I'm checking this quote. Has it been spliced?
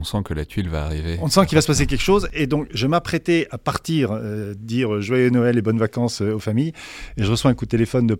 no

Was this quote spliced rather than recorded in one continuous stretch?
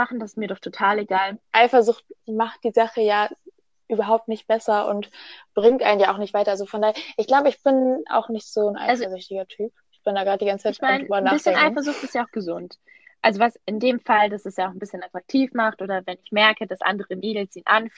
yes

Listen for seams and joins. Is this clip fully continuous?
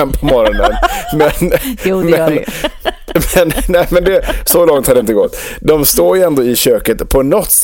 yes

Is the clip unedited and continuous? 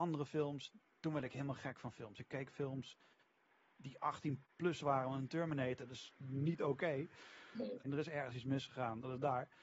no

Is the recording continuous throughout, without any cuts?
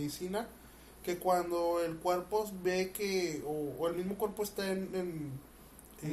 yes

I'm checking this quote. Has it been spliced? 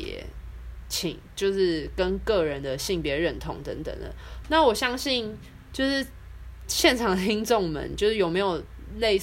yes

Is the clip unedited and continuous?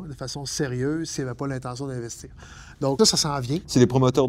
no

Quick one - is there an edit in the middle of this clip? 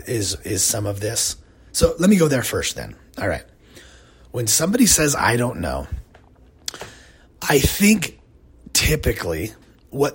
no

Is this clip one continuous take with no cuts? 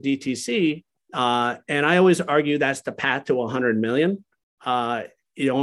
no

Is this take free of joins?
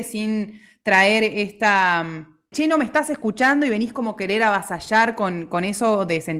no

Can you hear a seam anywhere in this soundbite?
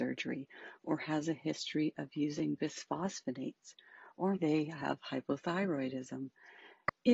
yes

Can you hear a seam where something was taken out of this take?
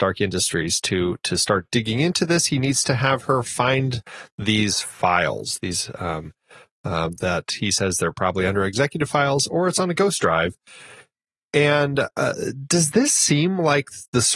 yes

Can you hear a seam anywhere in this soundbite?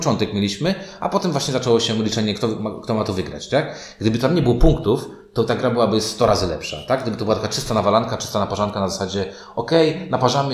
no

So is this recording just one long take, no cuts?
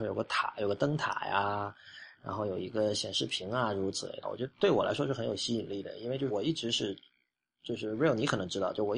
no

